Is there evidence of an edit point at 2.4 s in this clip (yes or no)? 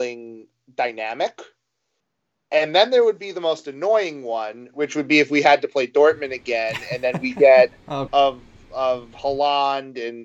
no